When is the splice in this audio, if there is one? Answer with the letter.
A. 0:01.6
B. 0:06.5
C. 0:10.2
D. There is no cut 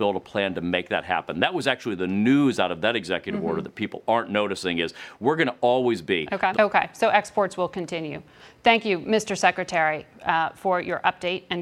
B